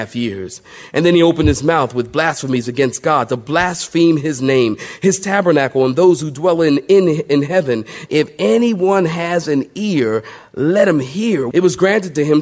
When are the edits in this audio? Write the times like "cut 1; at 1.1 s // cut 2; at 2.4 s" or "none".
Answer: cut 1; at 8.1 s // cut 2; at 11.5 s